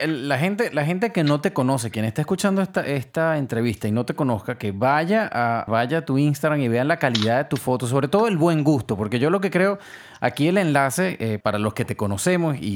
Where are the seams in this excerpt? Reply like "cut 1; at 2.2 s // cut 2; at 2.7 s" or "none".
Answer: cut 1; at 5.7 s // cut 2; at 11.4 s

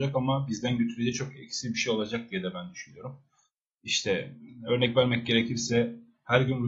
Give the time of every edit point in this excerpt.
none

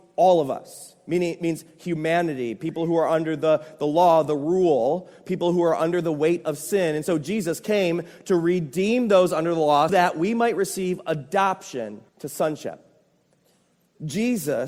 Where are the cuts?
cut 1; at 9.9 s // cut 2; at 12.1 s

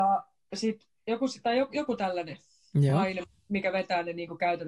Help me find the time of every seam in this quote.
none

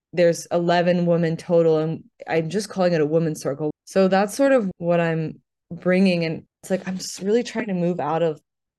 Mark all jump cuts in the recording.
cut 1; at 3.7 s

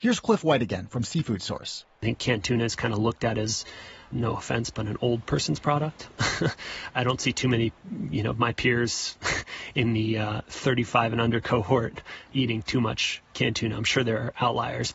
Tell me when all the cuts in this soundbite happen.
none

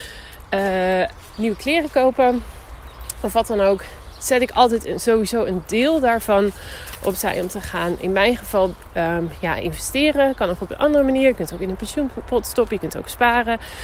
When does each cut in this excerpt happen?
none

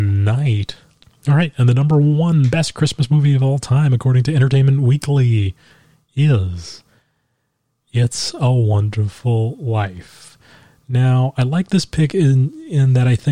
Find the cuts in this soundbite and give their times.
cut 1; at 1.1 s

